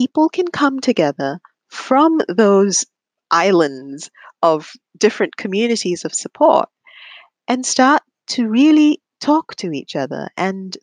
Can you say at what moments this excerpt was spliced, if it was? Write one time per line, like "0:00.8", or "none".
none